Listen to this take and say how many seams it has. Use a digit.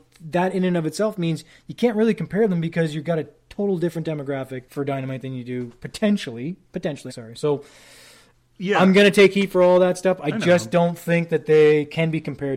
1